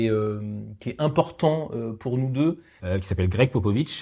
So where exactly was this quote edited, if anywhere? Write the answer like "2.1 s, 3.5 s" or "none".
2.8 s

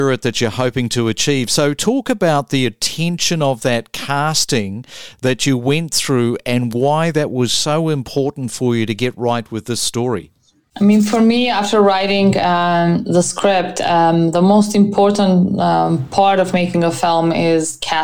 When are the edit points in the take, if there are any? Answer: none

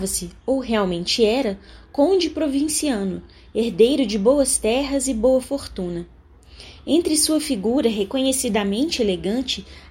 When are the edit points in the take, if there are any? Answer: none

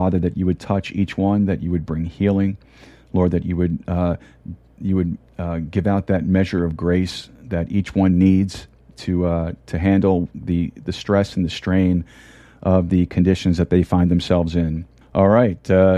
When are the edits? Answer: 15.0 s

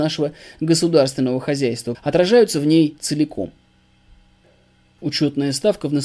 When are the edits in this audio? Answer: 1.9 s

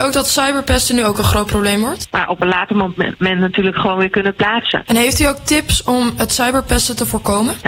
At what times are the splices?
2.1 s

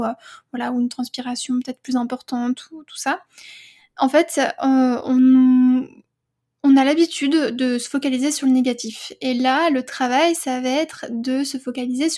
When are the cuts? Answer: none

